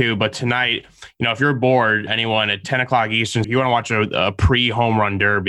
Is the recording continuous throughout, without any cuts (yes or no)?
no